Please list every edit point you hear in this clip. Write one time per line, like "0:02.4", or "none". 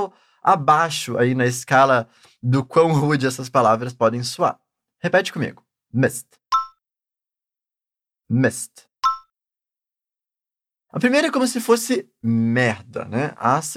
none